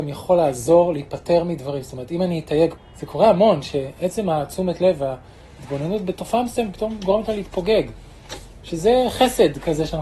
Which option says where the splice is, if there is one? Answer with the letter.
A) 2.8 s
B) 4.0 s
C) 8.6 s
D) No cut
A